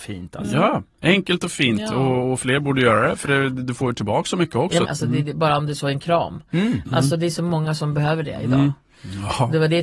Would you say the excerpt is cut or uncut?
cut